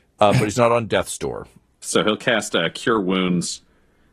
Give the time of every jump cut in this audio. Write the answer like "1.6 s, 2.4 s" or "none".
1.8 s